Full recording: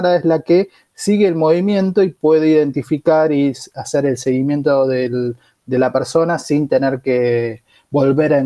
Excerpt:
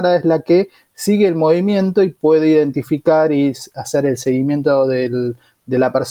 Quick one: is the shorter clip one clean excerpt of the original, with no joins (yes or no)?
yes